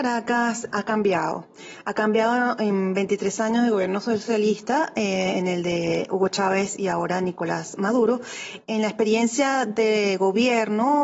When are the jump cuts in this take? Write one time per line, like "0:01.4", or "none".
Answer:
none